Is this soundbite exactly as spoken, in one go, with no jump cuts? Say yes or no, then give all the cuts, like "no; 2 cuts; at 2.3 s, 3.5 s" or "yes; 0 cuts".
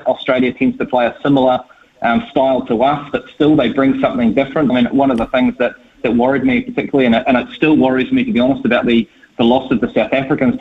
no; 1 cut; at 4.7 s